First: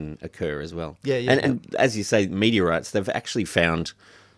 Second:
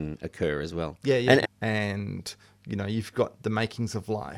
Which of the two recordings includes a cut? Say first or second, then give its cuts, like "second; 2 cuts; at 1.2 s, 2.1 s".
second; 1 cut; at 1.4 s